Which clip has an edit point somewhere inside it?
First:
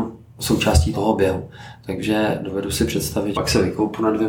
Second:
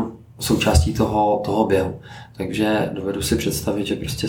first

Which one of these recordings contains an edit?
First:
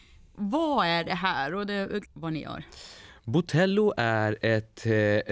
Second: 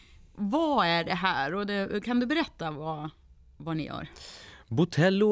first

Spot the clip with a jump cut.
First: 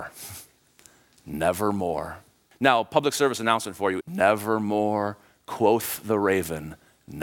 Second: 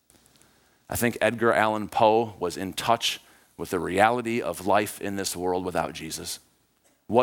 first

